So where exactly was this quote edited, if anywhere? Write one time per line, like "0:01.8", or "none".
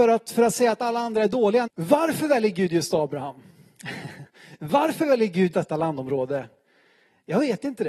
0:01.7
0:05.5

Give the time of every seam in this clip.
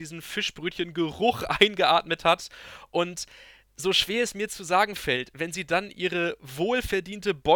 none

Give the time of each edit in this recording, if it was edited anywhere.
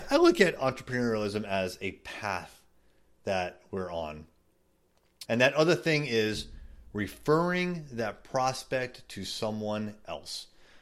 0:05.3

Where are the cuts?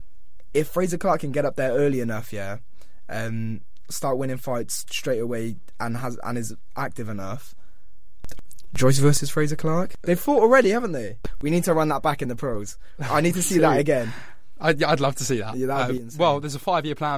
none

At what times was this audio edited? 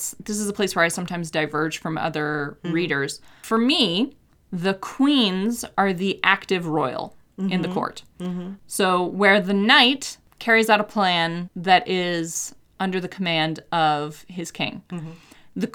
none

